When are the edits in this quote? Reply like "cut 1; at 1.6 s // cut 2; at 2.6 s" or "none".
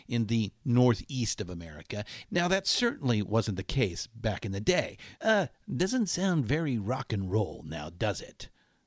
cut 1; at 2.2 s // cut 2; at 5.2 s